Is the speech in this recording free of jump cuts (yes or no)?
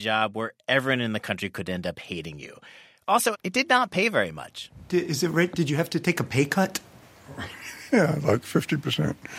no